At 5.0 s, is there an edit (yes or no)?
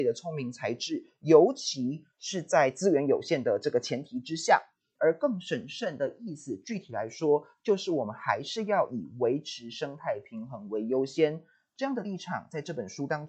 yes